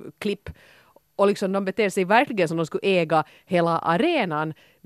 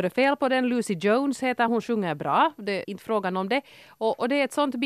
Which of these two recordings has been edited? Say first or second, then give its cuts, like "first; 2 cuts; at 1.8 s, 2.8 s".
second; 2 cuts; at 1.7 s, 2.8 s